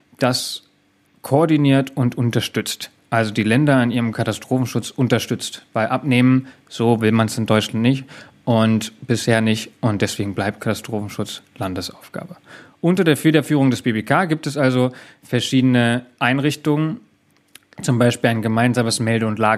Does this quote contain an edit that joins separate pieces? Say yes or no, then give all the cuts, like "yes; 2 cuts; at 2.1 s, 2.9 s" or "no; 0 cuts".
no; 0 cuts